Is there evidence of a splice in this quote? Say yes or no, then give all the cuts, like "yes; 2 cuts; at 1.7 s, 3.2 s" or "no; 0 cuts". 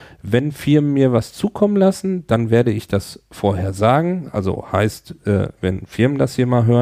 no; 0 cuts